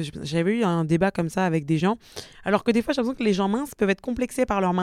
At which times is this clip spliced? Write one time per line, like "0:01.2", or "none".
0:02.3